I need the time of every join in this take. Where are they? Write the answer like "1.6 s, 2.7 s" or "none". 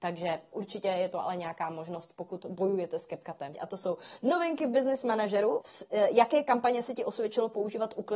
3.5 s, 5.6 s